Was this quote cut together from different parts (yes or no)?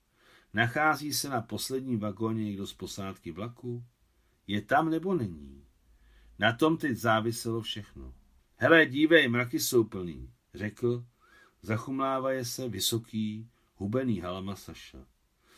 yes